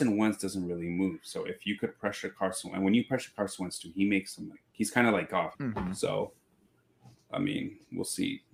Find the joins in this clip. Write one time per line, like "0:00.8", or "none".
0:05.5